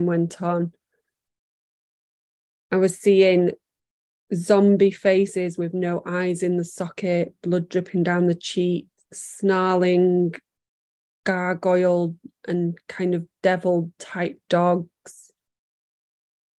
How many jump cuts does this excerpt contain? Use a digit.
0